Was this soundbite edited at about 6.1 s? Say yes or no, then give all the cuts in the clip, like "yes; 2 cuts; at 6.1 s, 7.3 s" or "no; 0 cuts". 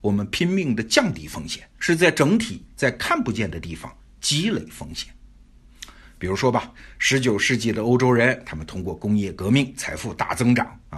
no; 1 cut; at 1.8 s